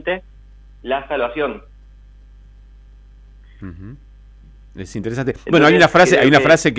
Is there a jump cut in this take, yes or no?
no